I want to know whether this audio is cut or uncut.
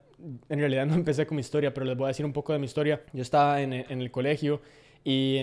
cut